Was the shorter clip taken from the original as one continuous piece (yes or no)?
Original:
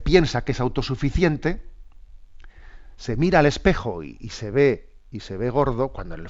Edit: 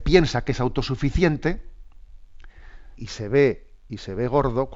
no